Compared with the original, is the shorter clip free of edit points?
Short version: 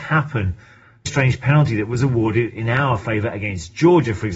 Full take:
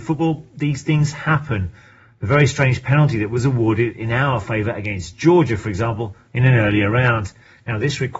no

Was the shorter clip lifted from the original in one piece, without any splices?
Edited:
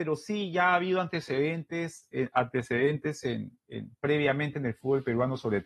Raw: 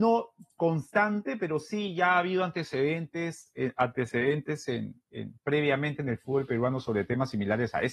yes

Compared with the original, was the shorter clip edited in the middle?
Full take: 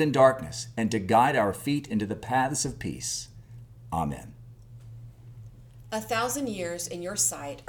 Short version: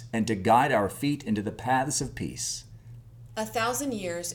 yes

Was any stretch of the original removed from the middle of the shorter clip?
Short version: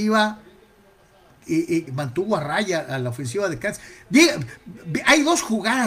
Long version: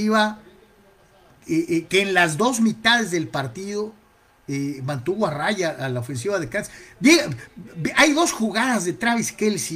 yes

